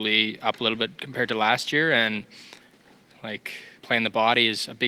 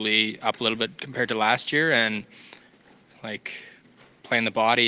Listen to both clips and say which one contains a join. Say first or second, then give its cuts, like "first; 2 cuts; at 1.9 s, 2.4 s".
first; 1 cut; at 3.8 s